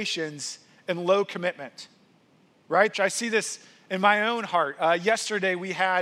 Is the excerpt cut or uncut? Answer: cut